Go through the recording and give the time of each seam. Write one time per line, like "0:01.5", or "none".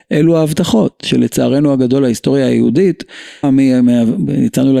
0:03.4